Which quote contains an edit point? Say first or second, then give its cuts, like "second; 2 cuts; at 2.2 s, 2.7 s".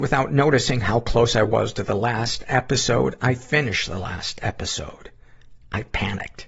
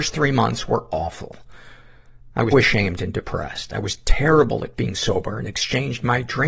second; 1 cut; at 2.5 s